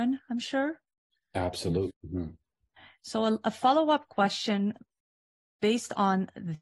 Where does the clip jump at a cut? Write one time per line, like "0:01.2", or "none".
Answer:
0:01.9

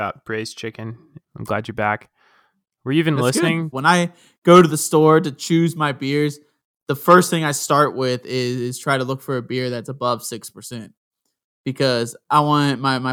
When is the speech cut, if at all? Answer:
0:01.2
0:03.7

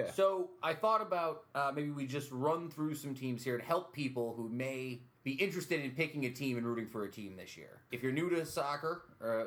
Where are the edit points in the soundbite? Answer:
0:05.1
0:07.9

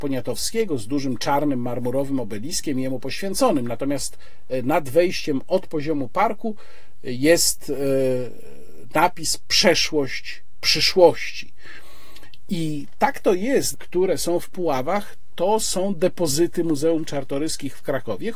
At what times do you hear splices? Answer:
0:12.5
0:13.7

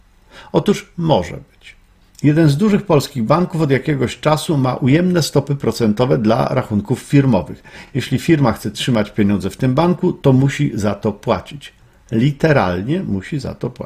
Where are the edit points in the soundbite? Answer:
none

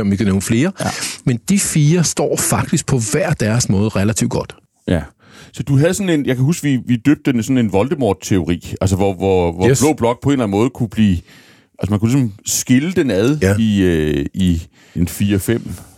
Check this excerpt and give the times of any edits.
0:15.0

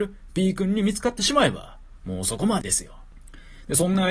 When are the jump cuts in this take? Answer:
0:02.6

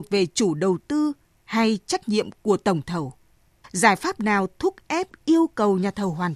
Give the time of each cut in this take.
0:03.6

